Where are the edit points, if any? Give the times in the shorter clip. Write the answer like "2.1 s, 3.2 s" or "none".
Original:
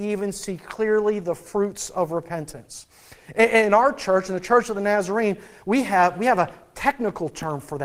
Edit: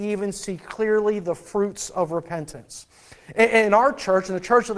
none